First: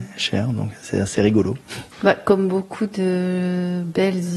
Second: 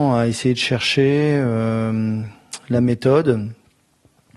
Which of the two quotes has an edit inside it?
first; 1 cut; at 1.9 s

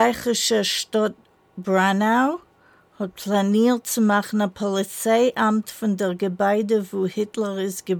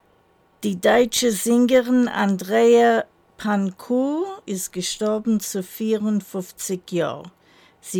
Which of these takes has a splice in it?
second; 1 cut; at 4.4 s

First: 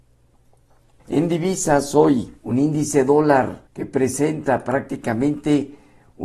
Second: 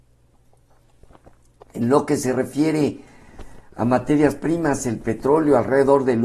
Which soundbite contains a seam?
first; 3 cuts; at 1.0 s, 2.4 s, 3.7 s

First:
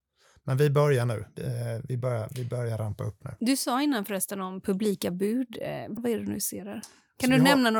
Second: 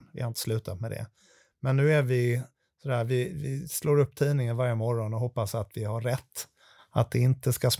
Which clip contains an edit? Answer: first; 1 cut; at 6.0 s

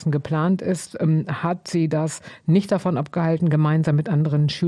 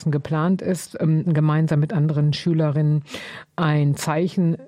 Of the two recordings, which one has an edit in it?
second; 1 cut; at 1.3 s

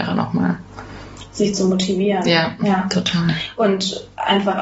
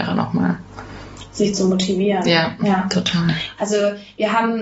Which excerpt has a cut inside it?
second; 1 cut; at 3.6 s

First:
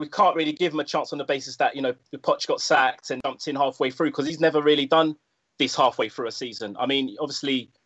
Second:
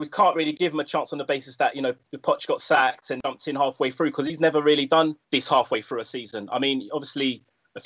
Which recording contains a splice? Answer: second; 1 cut; at 5.2 s

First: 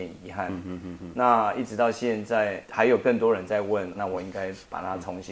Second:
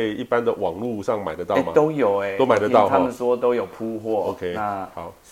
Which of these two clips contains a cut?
first; 2 cuts; at 2.6 s, 4.0 s

